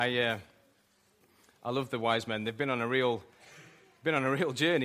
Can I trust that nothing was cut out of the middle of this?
yes; 0 cuts

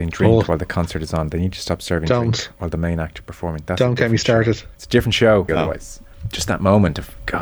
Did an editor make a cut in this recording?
yes; 1 cut; at 5.5 s

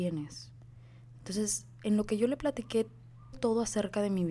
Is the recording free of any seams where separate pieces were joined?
no; 2 cuts; at 1.1 s, 3.3 s

